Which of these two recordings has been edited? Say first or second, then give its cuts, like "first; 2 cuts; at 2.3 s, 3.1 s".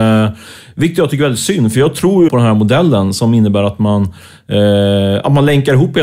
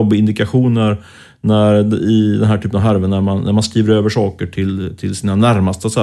first; 1 cut; at 2.3 s